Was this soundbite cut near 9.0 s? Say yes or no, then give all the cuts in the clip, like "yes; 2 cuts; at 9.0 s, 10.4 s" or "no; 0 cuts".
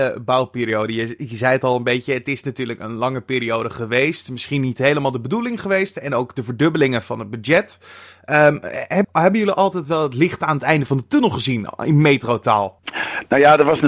yes; 1 cut; at 9.0 s